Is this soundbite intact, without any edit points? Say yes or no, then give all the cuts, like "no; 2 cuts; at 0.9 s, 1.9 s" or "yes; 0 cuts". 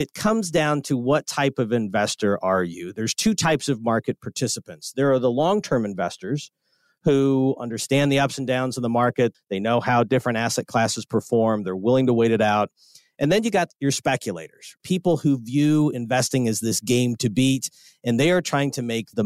no; 1 cut; at 9.3 s